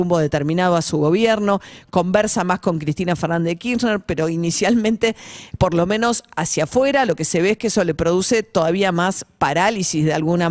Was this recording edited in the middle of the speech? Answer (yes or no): no